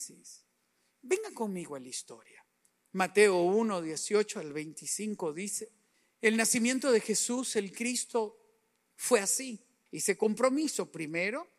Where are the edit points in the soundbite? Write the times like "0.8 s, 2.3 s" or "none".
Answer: 9.9 s